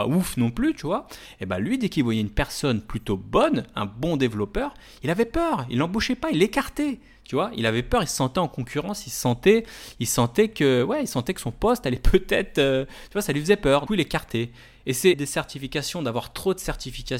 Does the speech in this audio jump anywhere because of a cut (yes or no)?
yes